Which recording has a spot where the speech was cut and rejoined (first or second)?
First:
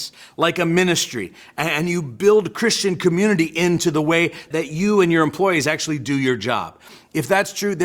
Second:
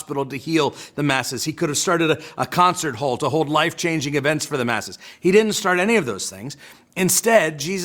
first